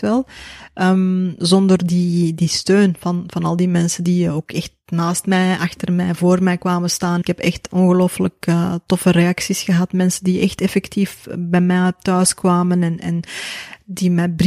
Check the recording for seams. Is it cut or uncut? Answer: uncut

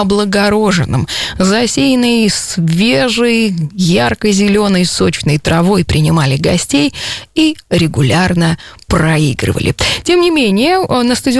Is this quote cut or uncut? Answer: uncut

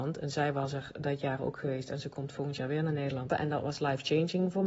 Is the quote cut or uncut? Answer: cut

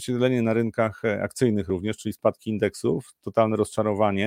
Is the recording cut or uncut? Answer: uncut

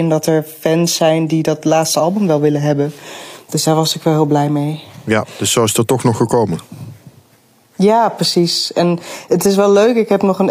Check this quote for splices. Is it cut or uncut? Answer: uncut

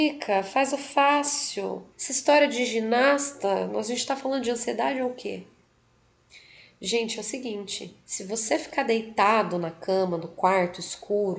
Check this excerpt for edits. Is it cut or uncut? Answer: cut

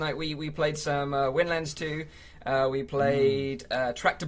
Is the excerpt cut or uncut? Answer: uncut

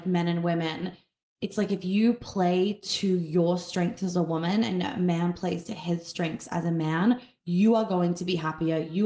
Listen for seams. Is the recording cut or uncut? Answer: uncut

